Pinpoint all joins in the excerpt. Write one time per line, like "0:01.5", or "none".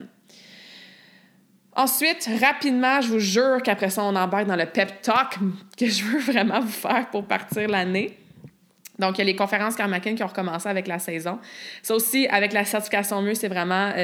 none